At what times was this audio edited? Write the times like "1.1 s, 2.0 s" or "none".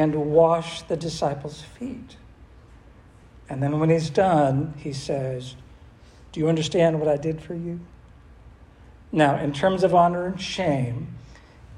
none